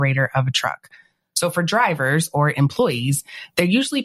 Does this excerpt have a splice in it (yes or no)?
no